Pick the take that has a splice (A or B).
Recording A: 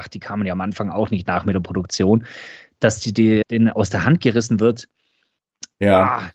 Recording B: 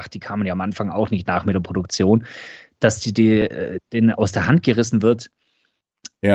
A